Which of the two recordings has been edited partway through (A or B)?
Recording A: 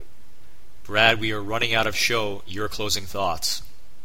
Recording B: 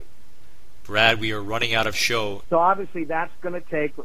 B